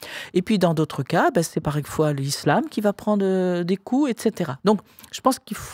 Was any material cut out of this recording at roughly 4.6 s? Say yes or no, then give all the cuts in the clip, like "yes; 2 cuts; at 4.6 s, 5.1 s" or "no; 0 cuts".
yes; 1 cut; at 4.6 s